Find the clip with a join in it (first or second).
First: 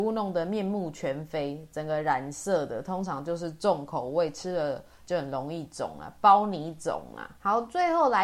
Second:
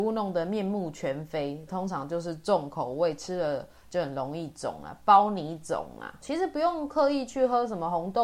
second